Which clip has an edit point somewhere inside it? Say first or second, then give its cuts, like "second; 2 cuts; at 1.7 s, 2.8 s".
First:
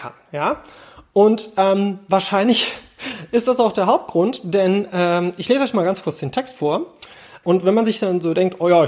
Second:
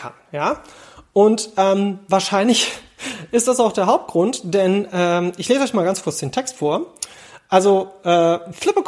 first; 1 cut; at 7.4 s